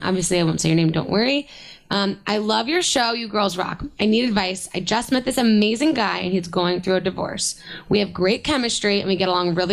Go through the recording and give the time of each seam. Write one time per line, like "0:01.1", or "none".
none